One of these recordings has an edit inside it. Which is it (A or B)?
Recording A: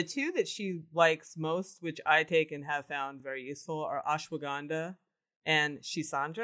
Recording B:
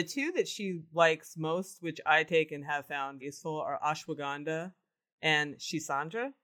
B